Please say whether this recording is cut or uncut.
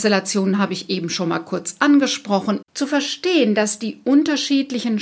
cut